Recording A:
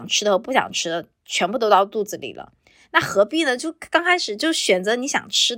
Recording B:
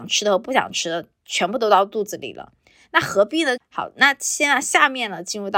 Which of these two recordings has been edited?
B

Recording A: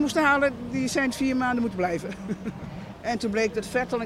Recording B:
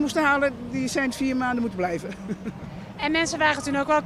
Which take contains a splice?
A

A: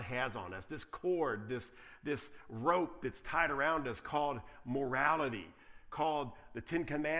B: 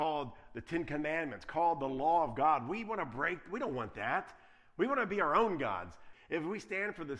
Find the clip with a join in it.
B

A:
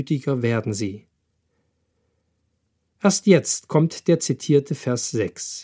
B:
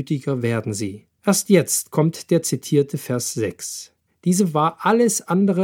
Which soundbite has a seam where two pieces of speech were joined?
B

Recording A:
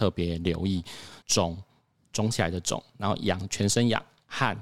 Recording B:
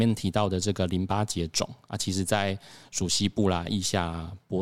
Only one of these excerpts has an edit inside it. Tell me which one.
A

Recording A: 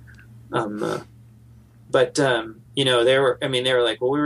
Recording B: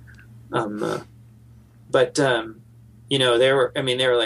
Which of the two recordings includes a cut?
A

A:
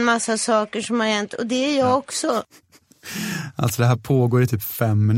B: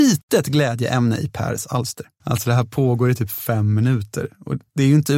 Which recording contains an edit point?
B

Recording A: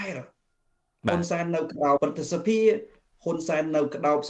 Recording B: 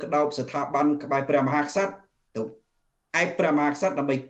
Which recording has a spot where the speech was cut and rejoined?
A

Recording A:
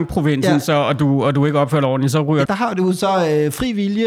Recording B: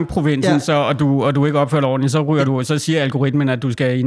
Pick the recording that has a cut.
A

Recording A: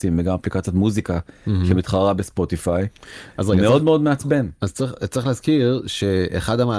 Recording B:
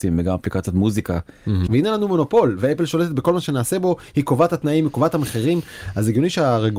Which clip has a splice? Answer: B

